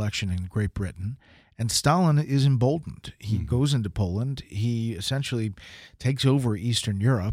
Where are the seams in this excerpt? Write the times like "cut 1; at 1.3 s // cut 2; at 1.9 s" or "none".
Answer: none